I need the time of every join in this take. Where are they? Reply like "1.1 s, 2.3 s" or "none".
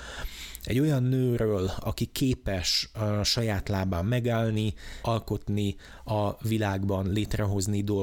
1.8 s, 5.0 s